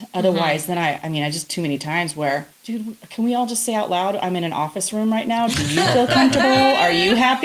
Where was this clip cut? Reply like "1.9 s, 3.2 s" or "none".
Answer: 2.5 s